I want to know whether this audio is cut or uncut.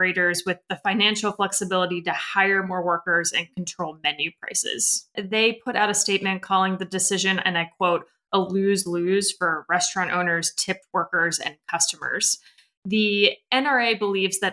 cut